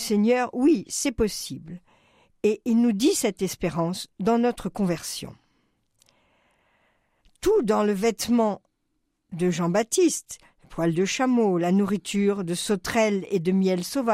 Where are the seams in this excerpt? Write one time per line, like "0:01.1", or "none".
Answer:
none